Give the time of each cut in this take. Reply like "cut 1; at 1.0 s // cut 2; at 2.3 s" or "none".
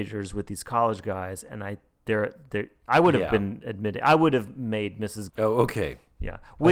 cut 1; at 5.3 s